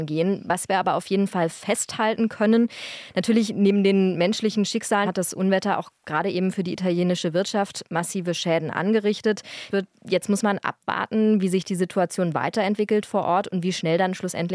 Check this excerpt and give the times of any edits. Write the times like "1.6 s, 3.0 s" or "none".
5.0 s, 9.7 s